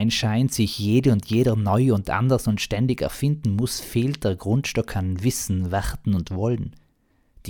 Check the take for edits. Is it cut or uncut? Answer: uncut